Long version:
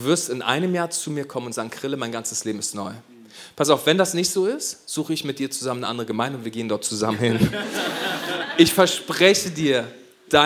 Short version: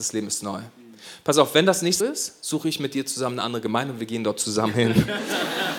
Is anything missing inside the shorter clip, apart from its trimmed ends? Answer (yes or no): yes